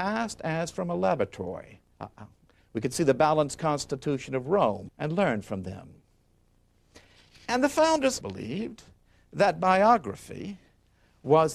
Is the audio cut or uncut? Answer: cut